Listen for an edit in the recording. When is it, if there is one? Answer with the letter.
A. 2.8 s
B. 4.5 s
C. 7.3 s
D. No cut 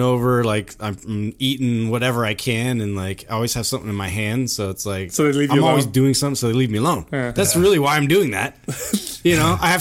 D